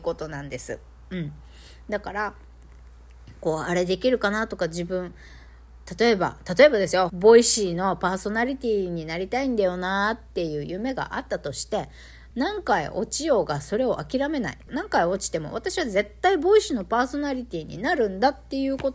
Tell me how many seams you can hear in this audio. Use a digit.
3